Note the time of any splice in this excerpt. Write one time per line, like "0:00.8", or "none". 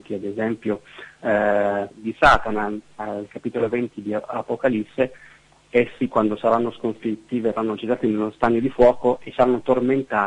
0:01.9